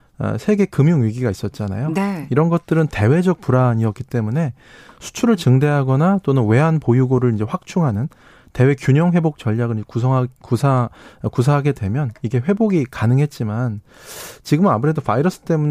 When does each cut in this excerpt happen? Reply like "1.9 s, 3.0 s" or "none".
none